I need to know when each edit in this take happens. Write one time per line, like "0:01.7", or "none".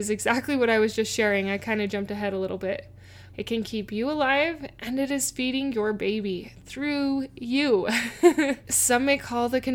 0:03.3
0:08.6